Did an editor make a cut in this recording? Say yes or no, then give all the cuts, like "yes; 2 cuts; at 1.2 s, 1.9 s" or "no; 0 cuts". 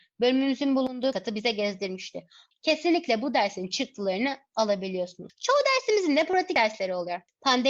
yes; 1 cut; at 2.5 s